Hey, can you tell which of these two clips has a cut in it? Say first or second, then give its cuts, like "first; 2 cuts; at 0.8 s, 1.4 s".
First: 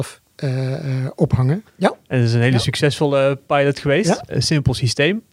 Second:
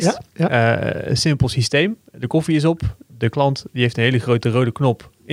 first; 2 cuts; at 1.6 s, 4.3 s